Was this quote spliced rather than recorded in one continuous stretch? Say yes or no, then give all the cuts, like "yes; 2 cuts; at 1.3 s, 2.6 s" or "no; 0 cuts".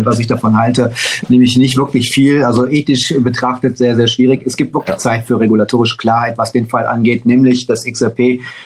no; 0 cuts